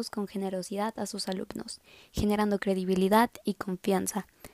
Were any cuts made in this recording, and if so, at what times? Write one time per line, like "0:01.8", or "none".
none